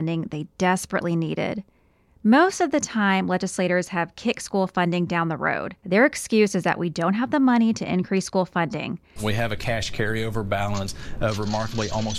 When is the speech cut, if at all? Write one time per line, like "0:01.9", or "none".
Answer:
0:05.8
0:09.2

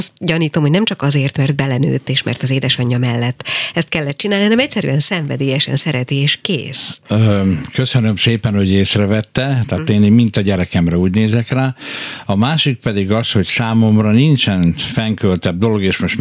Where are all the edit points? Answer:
0:09.6

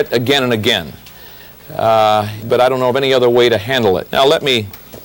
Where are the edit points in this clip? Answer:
0:02.4
0:04.1

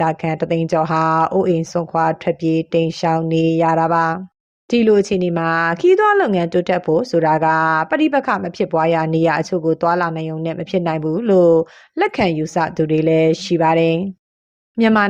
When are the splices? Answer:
none

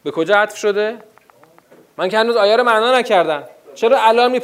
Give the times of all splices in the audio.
none

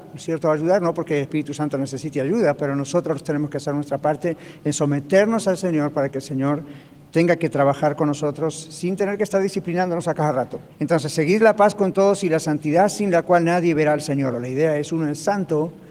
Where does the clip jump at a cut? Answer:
0:10.7
0:14.3

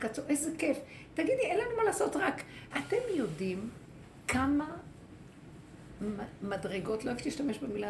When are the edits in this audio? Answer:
0:02.7

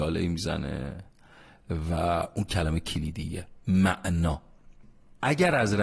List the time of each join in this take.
0:02.5

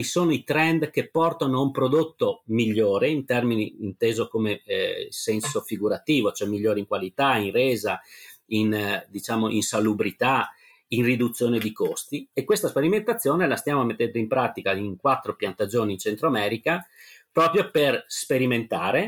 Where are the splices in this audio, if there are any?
0:12.3

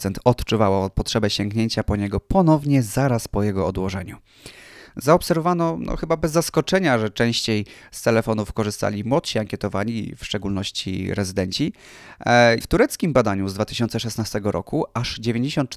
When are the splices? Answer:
0:12.6

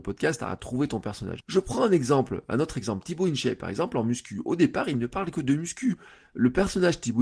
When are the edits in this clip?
0:01.4

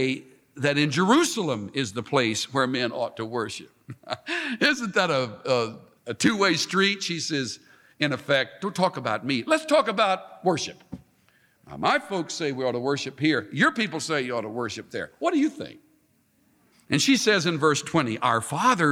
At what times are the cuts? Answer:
0:06.0
0:16.7

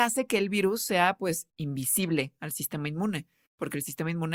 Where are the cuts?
none

